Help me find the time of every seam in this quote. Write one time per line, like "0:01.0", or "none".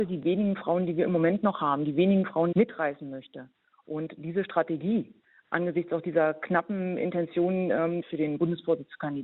0:02.5
0:08.0